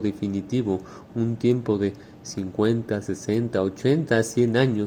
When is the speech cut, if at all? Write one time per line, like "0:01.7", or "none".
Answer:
none